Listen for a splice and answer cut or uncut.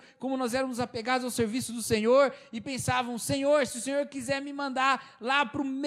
uncut